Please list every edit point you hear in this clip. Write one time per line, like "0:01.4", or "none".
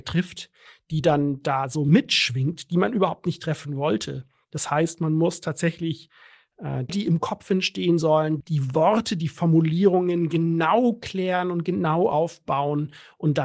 0:06.9
0:08.4